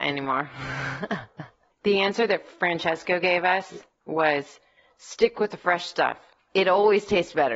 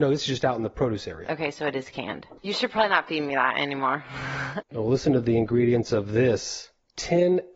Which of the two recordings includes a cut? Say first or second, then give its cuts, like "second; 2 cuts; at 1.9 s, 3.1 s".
second; 2 cuts; at 2.4 s, 4.6 s